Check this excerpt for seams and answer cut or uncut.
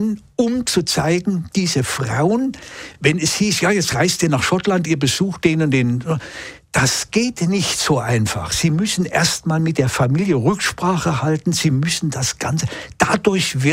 uncut